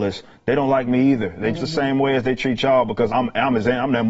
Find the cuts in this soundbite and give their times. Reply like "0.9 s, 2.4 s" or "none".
1.5 s, 3.1 s